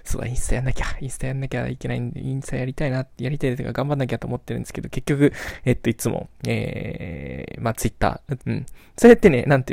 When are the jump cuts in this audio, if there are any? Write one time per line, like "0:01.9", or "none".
0:08.4

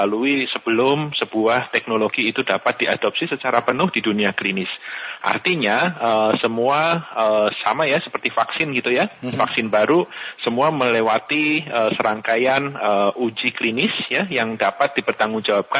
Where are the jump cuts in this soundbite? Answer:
none

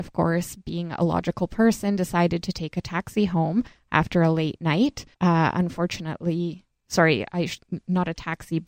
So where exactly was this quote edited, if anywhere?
0:05.1

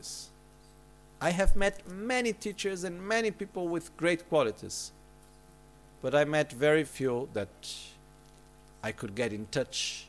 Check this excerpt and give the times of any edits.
0:06.8

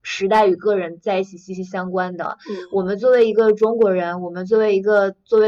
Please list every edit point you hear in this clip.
none

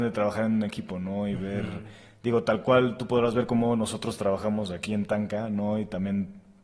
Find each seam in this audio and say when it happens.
none

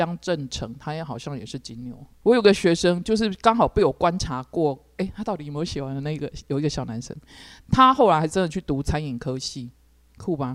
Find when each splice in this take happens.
0:02.2

